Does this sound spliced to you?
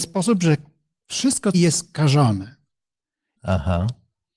yes; 2 cuts; at 1.5 s, 3.4 s

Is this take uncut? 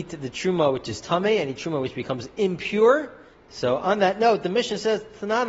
no; 1 cut; at 3.3 s

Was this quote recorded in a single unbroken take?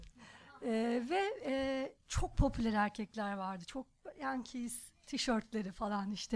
yes; 0 cuts

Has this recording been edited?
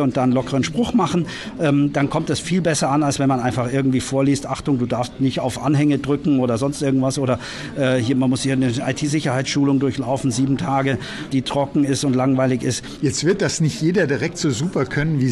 yes; 2 cuts; at 11.3 s, 13.0 s

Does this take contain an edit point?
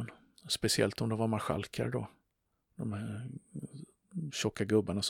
no; 0 cuts

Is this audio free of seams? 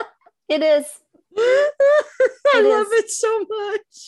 yes; 0 cuts

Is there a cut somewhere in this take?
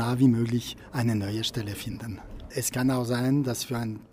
no; 0 cuts

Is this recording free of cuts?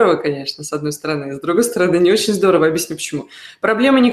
yes; 0 cuts

